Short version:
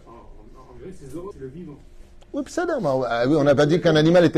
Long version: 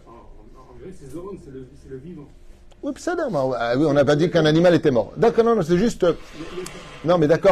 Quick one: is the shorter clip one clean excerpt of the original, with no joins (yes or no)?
no